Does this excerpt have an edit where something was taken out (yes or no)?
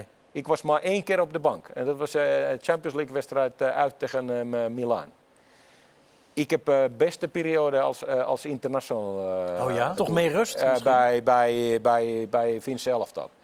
yes